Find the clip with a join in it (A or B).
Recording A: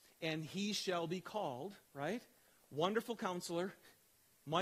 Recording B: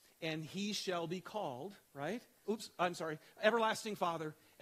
B